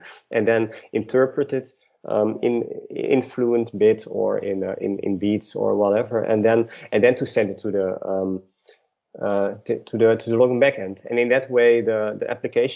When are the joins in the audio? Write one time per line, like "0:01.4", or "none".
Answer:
none